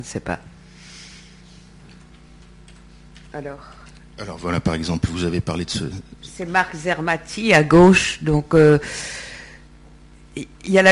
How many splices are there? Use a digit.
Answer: 0